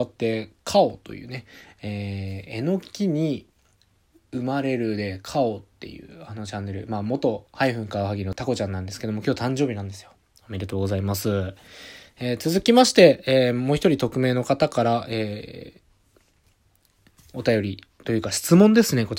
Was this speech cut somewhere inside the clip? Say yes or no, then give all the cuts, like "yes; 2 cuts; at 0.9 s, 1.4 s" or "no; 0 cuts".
no; 0 cuts